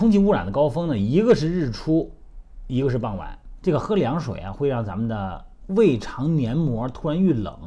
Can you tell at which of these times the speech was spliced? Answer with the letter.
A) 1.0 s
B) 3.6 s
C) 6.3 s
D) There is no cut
B